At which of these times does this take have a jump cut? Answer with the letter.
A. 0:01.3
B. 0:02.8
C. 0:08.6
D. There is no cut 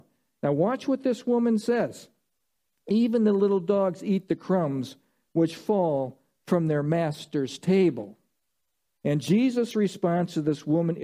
D